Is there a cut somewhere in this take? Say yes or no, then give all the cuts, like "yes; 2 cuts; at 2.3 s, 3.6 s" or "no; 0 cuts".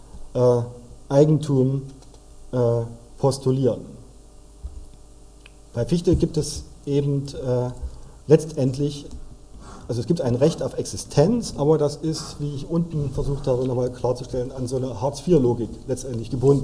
no; 0 cuts